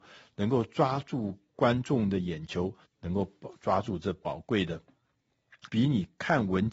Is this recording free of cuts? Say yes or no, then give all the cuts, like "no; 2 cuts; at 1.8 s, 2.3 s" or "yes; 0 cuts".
no; 2 cuts; at 2.8 s, 5.7 s